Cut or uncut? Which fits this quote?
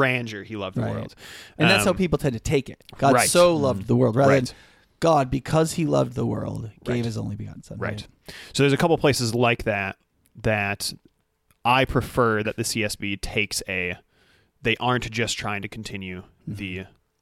uncut